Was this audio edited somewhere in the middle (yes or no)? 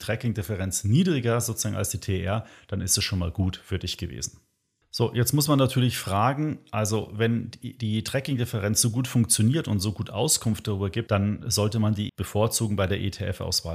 yes